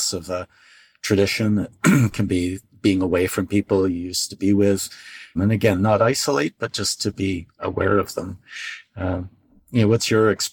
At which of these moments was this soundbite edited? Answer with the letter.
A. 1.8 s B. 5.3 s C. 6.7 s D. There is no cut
B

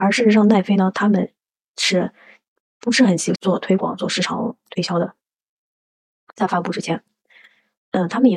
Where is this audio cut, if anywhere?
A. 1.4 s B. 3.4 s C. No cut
B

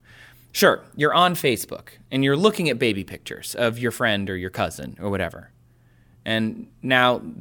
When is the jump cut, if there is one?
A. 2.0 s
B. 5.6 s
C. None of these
C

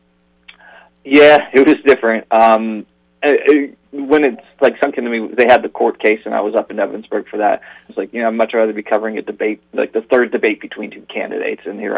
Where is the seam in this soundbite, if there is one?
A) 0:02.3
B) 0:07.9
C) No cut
B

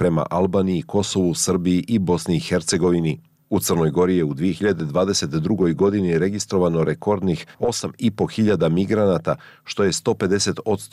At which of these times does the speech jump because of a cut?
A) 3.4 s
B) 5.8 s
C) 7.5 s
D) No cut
C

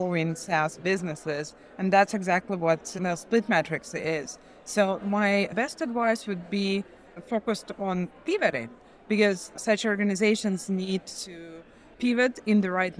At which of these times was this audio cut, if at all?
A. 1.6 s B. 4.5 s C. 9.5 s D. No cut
C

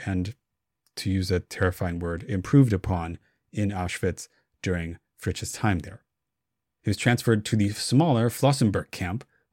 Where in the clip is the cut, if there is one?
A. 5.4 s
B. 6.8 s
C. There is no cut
B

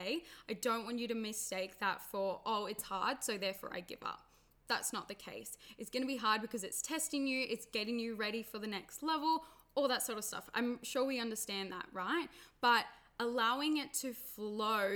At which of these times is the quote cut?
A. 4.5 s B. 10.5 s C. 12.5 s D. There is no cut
D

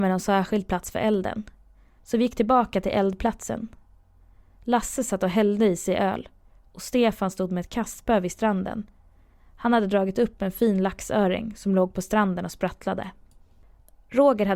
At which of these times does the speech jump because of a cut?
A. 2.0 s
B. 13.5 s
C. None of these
A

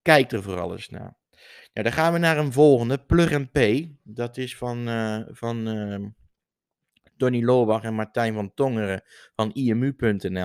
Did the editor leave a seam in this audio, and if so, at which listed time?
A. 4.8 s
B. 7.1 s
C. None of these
C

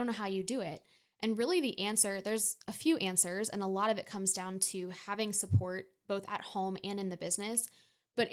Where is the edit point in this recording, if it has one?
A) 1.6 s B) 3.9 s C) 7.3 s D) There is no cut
D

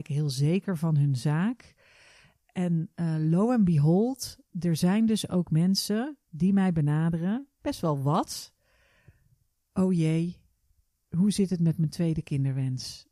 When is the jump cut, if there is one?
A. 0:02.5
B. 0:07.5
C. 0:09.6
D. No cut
D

